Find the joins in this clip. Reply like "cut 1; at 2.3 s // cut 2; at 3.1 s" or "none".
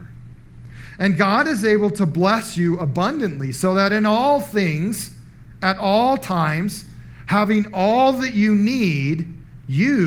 none